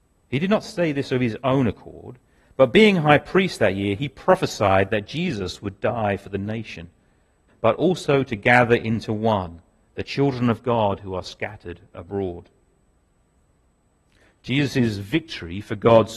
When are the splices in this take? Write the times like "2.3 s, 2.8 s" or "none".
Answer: 7.5 s